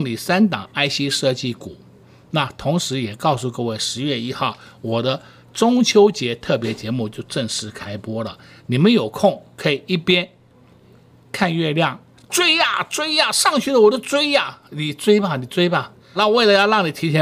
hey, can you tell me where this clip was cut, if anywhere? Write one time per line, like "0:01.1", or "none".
0:12.2
0:16.2